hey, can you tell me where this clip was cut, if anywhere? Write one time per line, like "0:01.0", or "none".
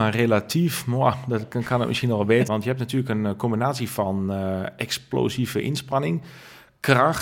0:02.5